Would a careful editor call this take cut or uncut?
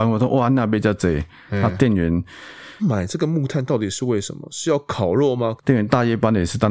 cut